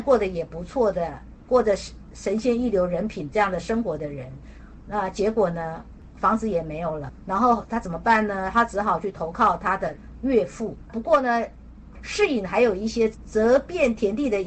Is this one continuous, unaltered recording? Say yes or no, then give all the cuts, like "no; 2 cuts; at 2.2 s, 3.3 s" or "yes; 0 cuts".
no; 2 cuts; at 10.9 s, 11.9 s